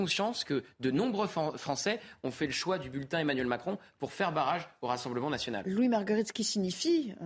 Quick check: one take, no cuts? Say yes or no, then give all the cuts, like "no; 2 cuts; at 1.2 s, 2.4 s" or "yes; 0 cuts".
yes; 0 cuts